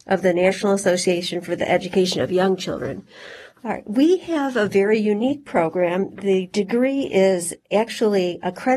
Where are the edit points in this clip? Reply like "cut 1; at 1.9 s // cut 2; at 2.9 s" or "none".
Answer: cut 1; at 3.5 s